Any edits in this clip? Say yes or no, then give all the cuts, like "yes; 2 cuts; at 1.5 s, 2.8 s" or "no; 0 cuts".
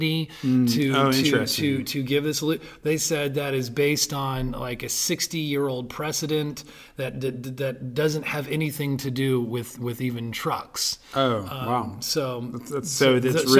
no; 0 cuts